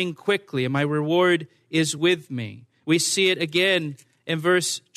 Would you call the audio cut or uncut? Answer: uncut